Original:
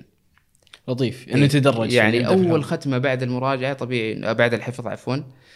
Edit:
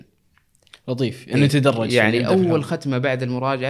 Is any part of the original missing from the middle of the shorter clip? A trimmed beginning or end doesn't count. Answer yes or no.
no